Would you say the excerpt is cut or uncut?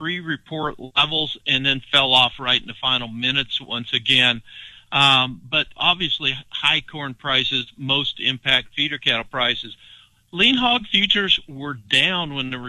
uncut